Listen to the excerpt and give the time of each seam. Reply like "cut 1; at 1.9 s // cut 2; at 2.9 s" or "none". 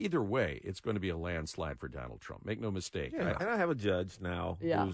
cut 1; at 3.4 s